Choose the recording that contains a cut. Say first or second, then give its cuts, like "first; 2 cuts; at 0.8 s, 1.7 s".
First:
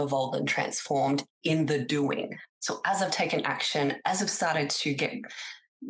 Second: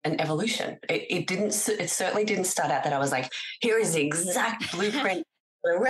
first; 1 cut; at 2.5 s